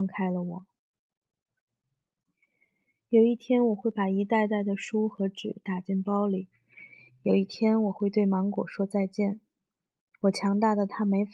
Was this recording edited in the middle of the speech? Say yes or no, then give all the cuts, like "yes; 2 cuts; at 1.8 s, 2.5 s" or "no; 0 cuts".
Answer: no; 0 cuts